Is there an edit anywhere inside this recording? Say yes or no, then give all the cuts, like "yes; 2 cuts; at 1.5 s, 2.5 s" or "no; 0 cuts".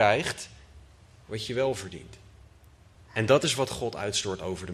yes; 1 cut; at 2.9 s